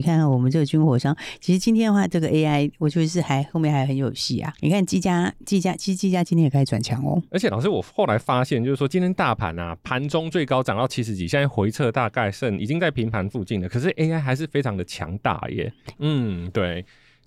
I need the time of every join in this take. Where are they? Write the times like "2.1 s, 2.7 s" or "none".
15.9 s